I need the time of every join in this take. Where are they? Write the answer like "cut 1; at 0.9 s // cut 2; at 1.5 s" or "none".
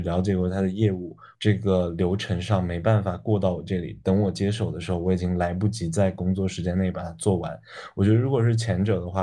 cut 1; at 1.3 s